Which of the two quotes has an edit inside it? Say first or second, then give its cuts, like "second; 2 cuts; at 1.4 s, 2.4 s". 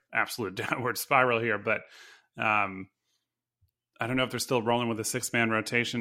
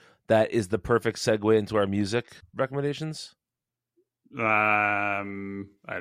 second; 1 cut; at 2.4 s